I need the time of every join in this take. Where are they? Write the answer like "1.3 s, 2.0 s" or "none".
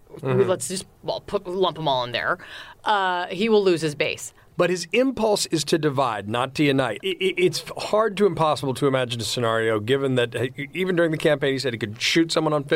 4.5 s, 7.0 s